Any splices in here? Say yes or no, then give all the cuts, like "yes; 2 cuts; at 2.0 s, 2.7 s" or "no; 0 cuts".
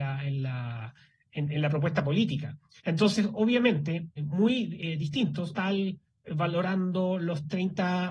yes; 3 cuts; at 2.8 s, 4.2 s, 5.5 s